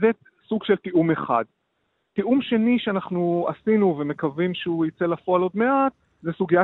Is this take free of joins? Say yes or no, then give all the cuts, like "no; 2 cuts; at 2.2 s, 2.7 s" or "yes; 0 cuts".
yes; 0 cuts